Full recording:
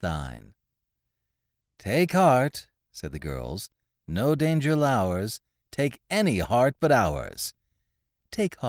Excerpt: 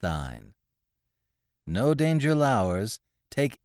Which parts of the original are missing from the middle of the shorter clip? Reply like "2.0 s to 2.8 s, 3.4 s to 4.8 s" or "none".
1.5 s to 3.9 s